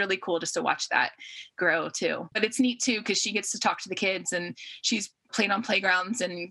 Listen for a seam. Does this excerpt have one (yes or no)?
yes